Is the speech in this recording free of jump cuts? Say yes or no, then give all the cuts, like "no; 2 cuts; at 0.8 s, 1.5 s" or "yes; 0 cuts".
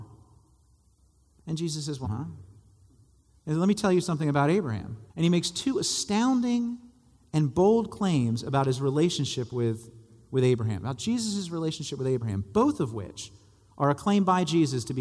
no; 2 cuts; at 2.0 s, 5.1 s